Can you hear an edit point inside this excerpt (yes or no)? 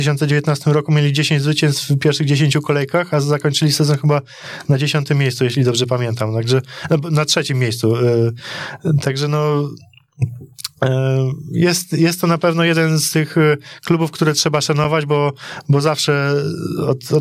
no